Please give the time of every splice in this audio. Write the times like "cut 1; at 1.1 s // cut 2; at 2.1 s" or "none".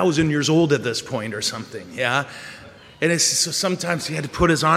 none